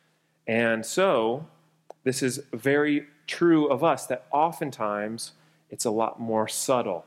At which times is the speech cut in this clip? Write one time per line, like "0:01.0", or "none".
none